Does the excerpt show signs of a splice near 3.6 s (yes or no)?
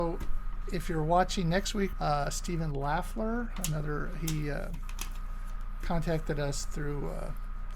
no